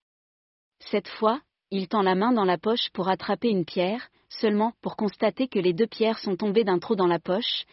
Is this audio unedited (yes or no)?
yes